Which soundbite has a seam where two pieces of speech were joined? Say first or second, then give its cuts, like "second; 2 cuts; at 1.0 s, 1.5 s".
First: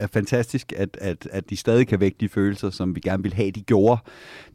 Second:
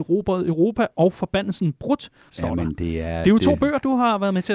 second; 1 cut; at 2.3 s